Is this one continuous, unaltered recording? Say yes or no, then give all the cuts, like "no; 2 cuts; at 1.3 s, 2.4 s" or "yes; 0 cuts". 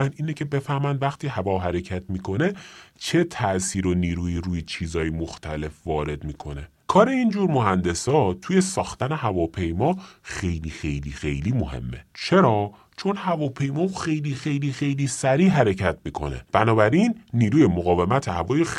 no; 3 cuts; at 12.1 s, 14.4 s, 16.4 s